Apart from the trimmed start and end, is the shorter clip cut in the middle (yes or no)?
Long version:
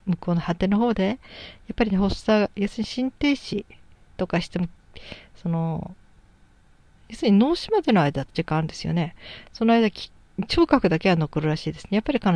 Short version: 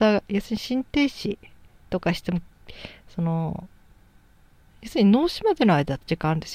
no